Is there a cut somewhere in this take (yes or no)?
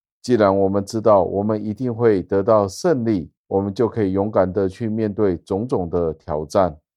yes